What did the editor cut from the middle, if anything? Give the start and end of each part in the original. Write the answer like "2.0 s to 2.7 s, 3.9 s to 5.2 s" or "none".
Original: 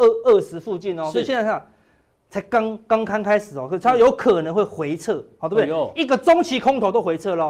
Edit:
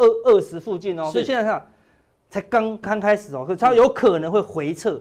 2.8 s to 3.1 s